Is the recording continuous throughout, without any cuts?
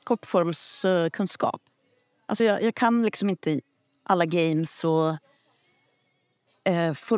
yes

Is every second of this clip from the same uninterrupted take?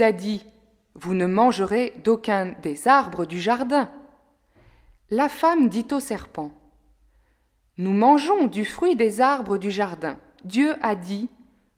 no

